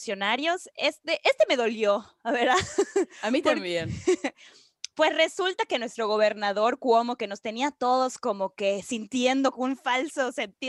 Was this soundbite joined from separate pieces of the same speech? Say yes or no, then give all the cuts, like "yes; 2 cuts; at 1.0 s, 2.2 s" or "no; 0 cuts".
no; 0 cuts